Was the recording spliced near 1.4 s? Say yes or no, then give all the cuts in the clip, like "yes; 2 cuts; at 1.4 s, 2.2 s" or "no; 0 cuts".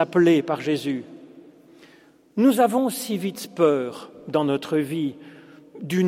no; 0 cuts